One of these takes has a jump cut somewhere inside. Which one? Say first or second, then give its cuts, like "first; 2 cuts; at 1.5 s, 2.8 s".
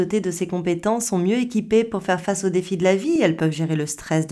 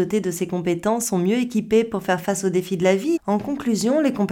second; 1 cut; at 3.2 s